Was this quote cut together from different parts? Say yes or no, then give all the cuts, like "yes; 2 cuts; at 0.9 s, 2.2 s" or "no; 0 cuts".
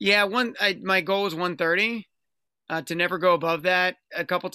no; 0 cuts